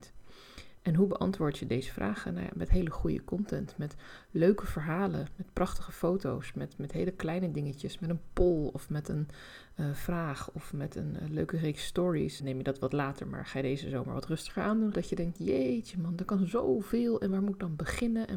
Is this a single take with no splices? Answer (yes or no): no